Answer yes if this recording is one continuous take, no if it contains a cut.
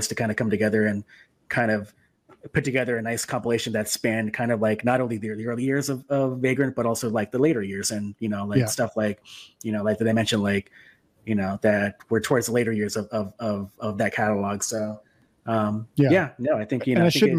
yes